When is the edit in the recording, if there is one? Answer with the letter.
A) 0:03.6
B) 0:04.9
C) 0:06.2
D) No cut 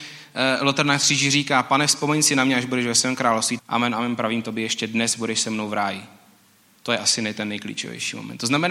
A